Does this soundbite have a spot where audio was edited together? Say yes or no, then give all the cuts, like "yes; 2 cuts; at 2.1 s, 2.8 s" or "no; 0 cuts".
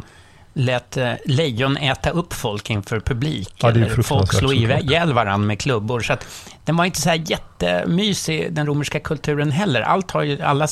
no; 0 cuts